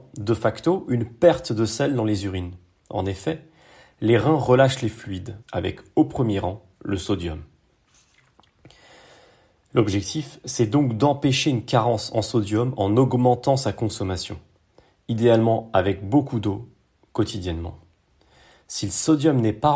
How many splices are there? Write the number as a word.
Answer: one